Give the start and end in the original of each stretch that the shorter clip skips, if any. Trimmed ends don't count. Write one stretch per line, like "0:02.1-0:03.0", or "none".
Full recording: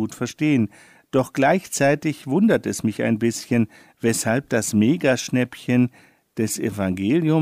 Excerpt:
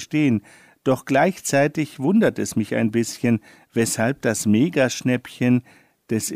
none